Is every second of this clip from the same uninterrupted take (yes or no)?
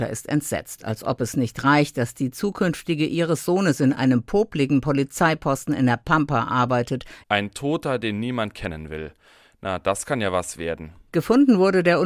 no